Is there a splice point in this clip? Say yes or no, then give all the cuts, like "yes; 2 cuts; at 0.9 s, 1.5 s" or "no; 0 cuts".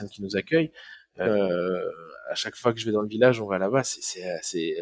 yes; 1 cut; at 1.2 s